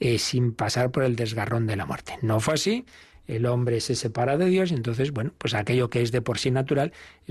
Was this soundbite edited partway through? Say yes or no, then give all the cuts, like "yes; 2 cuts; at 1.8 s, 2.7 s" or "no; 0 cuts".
no; 0 cuts